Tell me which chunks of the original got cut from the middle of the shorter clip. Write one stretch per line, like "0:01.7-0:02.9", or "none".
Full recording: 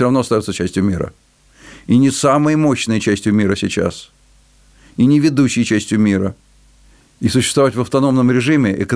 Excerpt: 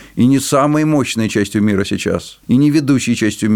0:04.1-0:04.9